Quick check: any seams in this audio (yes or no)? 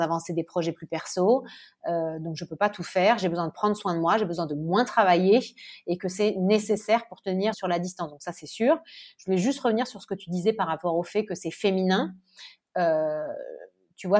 yes